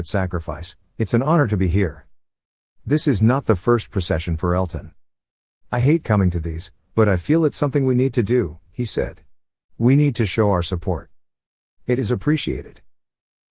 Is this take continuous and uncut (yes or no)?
yes